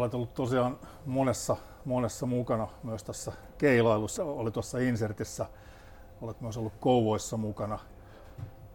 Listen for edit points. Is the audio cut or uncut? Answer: cut